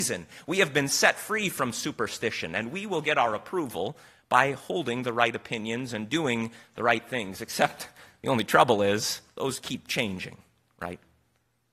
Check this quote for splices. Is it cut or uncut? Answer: uncut